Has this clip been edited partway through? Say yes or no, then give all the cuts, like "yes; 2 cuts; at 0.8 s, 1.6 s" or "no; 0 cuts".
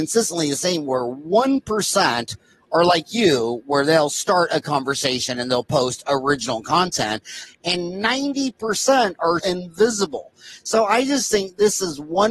yes; 2 cuts; at 7.5 s, 9.4 s